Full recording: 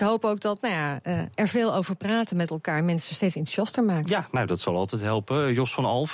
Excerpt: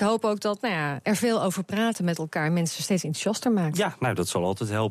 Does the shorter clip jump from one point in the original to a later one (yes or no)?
yes